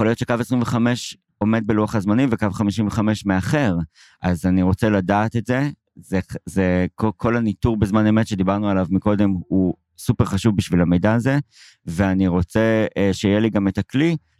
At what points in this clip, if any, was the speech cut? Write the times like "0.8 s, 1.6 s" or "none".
none